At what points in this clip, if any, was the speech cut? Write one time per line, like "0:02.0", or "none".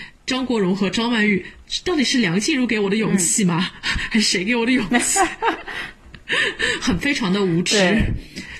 none